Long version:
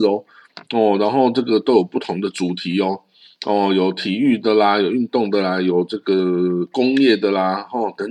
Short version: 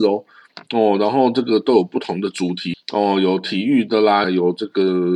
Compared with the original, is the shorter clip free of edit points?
no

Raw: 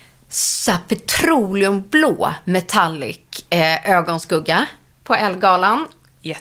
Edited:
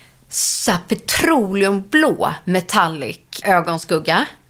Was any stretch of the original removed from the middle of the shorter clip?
yes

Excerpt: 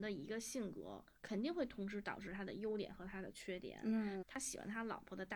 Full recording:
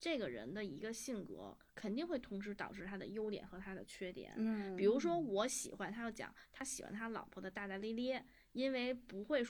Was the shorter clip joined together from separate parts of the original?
yes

